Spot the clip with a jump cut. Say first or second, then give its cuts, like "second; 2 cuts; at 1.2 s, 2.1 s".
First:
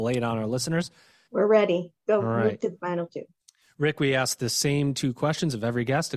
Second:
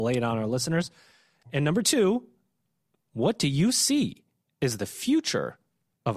first; 1 cut; at 1.3 s